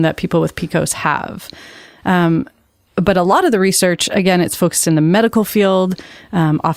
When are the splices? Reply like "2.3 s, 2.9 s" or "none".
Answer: 2.0 s